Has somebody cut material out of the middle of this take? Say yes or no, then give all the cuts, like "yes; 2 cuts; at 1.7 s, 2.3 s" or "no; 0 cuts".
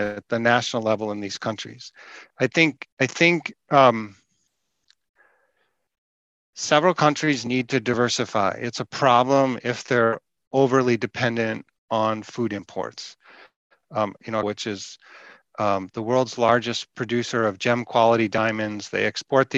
yes; 1 cut; at 14.4 s